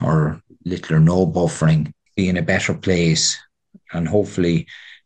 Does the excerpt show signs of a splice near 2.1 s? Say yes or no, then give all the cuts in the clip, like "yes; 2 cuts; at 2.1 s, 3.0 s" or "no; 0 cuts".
yes; 1 cut; at 2.1 s